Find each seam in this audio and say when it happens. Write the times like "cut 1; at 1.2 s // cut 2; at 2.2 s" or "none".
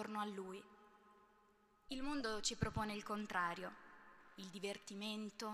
cut 1; at 1.9 s